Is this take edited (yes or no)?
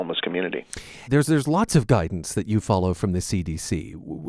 yes